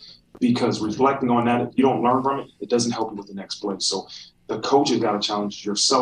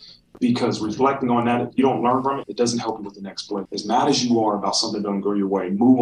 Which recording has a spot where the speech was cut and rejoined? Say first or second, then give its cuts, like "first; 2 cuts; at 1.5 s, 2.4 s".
second; 2 cuts; at 2.4 s, 3.7 s